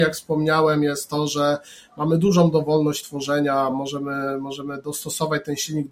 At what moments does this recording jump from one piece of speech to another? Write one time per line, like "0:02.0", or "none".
none